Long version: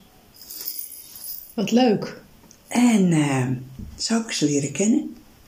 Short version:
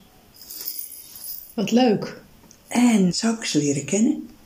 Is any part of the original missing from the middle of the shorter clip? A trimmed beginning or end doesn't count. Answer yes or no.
yes